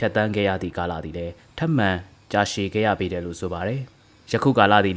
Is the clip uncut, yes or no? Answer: yes